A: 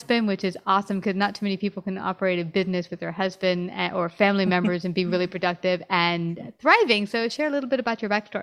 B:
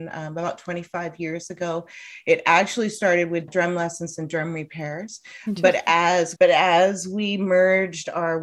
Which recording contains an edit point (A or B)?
B